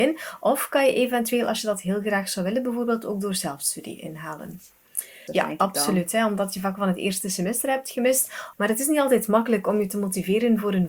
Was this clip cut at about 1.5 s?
no; 2 cuts; at 5.3 s, 8.5 s

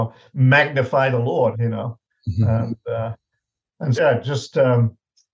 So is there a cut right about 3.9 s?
yes; 2 cuts; at 1.5 s, 3.9 s

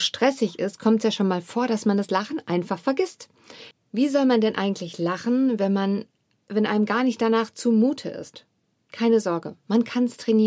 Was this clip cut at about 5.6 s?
no; 1 cut; at 3.7 s

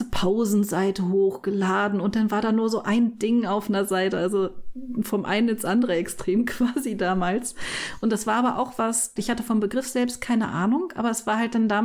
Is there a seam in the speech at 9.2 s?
yes; 1 cut; at 9.2 s

